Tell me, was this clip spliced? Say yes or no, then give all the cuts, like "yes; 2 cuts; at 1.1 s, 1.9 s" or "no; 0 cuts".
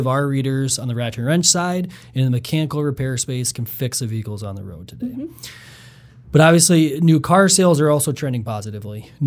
no; 0 cuts